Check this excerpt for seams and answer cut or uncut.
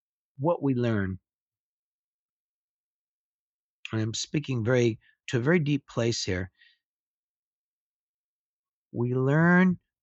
cut